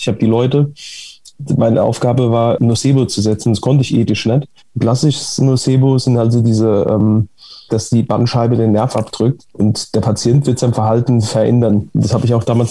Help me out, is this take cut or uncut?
cut